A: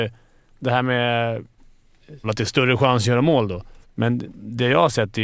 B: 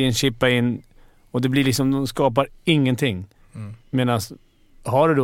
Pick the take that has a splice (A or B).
A